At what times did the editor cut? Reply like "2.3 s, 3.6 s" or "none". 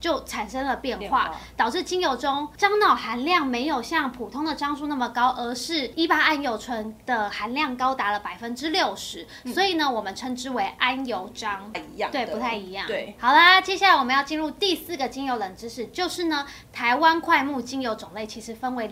11.7 s